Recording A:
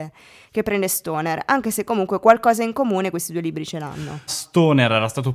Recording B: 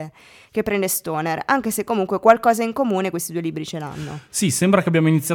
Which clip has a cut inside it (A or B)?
A